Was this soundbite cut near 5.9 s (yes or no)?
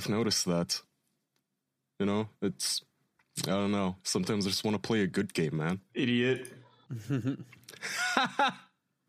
yes